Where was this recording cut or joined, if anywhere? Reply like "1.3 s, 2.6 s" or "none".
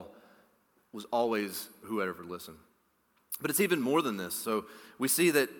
1.8 s